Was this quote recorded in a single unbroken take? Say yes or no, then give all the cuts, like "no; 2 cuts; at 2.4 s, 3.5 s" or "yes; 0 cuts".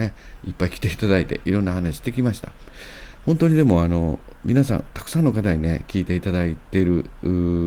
yes; 0 cuts